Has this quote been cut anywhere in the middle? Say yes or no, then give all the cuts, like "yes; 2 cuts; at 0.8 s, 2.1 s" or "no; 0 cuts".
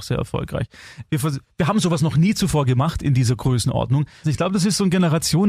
yes; 2 cuts; at 1.1 s, 4.2 s